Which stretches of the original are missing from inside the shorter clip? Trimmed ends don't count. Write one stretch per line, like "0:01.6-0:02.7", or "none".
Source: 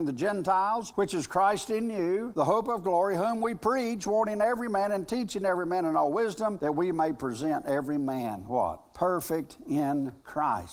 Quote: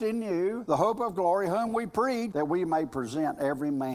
0:04.0-0:06.6